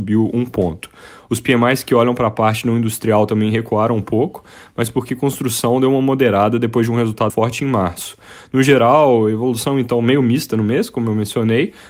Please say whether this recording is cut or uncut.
cut